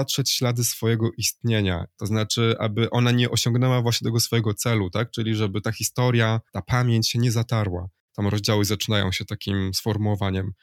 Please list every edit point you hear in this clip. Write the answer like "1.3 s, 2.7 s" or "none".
1.9 s, 6.5 s, 8.1 s